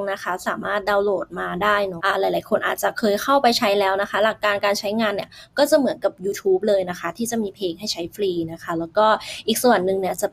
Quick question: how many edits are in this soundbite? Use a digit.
1